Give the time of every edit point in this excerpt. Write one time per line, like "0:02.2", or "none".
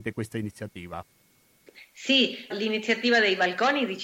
0:02.5